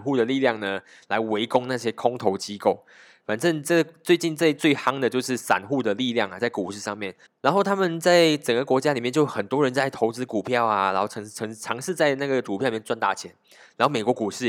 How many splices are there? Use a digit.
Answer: 1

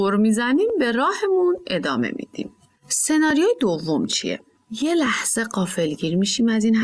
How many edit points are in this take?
0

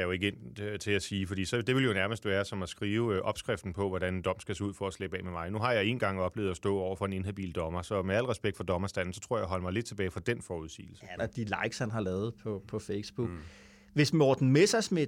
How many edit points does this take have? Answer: 1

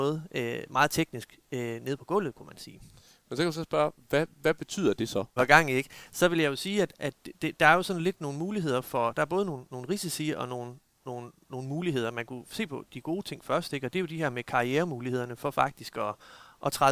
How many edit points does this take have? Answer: 1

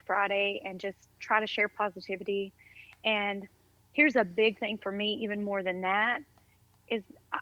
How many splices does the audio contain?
0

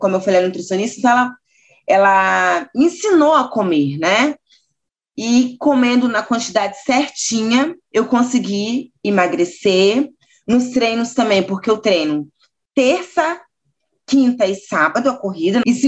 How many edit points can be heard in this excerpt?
0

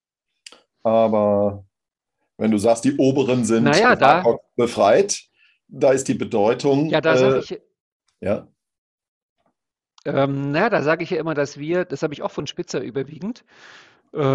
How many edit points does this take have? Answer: 0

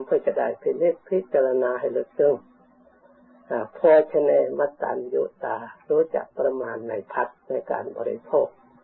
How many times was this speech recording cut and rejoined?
1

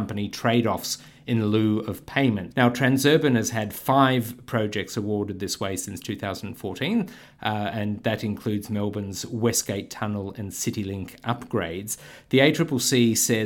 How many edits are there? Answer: 1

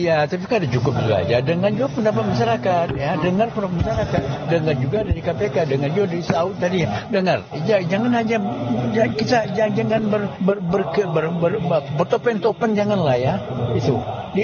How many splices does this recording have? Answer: 0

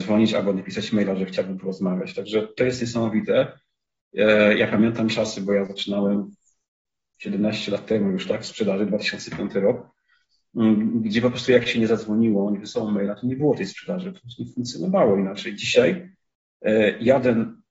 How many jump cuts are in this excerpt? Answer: 0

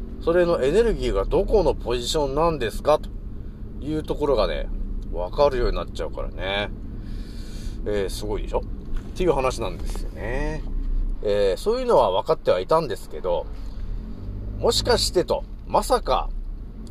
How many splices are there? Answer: 1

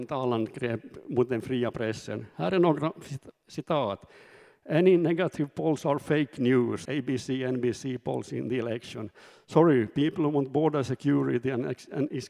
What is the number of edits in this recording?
1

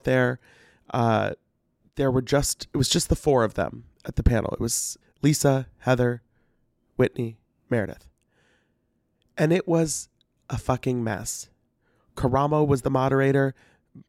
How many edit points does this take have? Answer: 1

